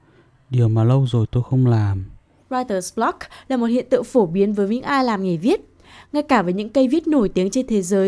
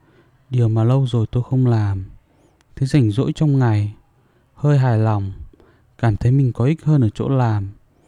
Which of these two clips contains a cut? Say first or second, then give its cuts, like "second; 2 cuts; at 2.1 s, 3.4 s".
first; 1 cut; at 2.4 s